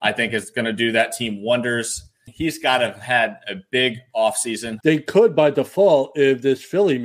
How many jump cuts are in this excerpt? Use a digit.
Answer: 2